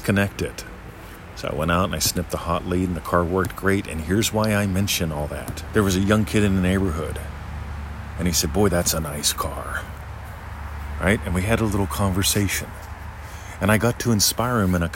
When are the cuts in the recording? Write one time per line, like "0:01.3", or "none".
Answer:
0:05.7